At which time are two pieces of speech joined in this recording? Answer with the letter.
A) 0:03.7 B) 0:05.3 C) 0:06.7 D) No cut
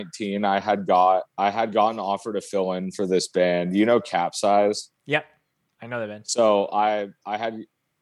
D